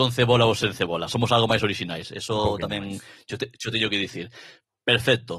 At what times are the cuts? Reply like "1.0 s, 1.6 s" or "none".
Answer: none